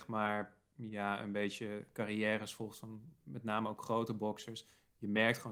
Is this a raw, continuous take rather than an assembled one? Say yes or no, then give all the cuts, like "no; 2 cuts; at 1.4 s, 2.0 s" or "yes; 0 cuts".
yes; 0 cuts